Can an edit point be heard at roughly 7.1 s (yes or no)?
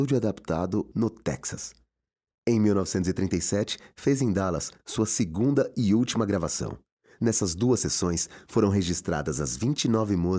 no